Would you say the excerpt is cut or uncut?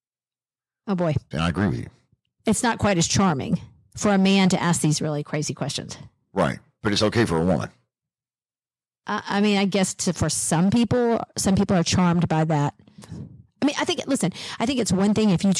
cut